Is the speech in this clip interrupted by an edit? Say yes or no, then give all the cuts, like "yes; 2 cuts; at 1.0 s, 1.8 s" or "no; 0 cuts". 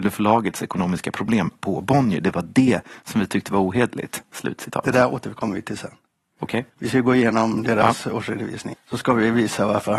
yes; 2 cuts; at 4.2 s, 8.7 s